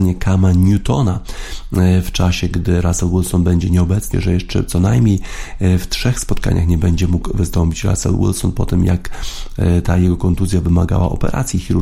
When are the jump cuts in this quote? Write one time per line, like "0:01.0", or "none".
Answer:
0:04.1